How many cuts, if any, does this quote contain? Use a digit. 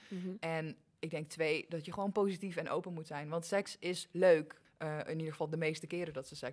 1